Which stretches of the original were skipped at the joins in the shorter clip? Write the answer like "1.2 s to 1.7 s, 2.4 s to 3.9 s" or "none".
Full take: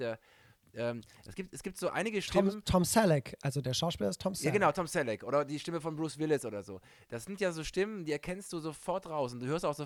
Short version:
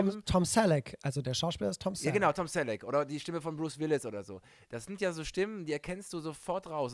none